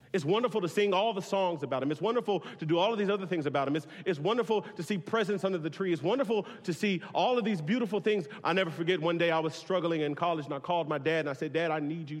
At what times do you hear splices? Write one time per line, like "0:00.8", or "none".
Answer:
0:08.4

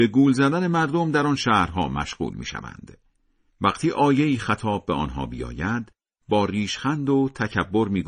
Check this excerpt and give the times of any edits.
0:03.5

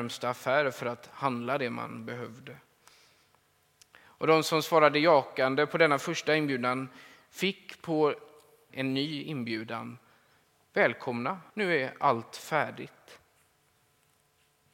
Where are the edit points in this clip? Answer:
0:08.7
0:11.5

